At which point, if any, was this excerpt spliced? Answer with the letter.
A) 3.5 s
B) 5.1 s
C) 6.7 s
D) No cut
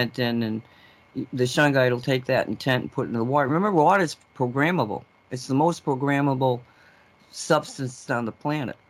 D